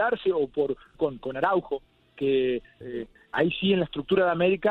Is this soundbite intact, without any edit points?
no; 2 cuts; at 0.9 s, 2.8 s

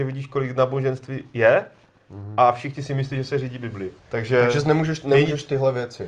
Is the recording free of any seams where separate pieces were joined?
no; 1 cut; at 4.0 s

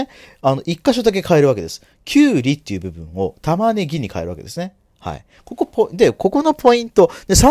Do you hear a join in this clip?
no; 0 cuts

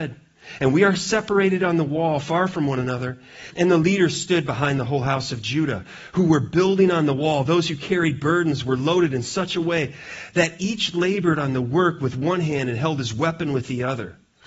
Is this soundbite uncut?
no; 1 cut; at 3.5 s

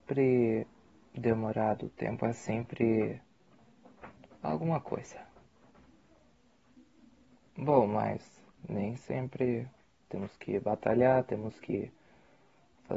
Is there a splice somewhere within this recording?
yes; 1 cut; at 10.0 s

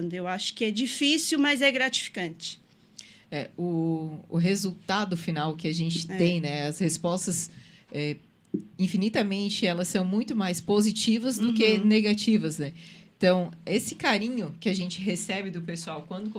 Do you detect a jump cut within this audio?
no; 0 cuts

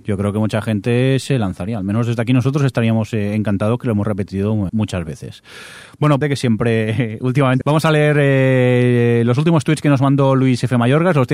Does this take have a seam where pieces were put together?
yes; 3 cuts; at 4.7 s, 6.2 s, 7.6 s

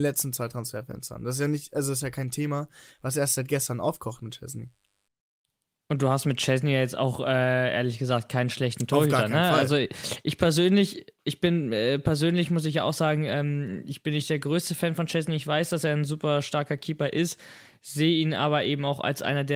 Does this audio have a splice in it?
no; 0 cuts

